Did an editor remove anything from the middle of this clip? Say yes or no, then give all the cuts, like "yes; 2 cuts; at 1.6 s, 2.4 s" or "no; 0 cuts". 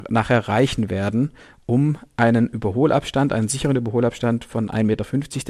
no; 0 cuts